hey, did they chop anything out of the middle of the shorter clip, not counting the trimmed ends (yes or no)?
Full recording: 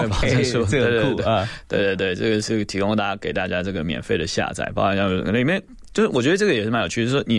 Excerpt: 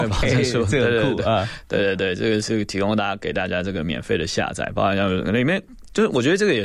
no